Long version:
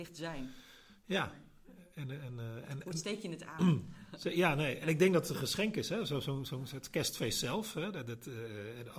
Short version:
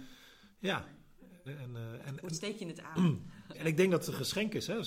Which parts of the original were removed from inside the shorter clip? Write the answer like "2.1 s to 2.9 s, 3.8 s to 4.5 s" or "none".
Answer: 1.9 s to 2.1 s, 4.2 s to 4.8 s